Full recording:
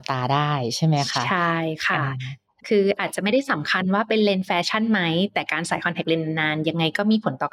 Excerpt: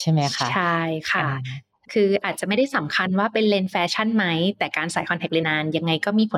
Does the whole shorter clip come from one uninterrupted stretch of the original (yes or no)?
no